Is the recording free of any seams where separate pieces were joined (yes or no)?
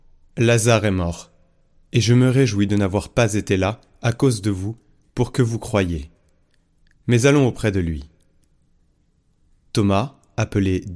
yes